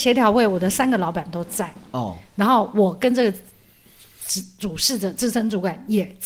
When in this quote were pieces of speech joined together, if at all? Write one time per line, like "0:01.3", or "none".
none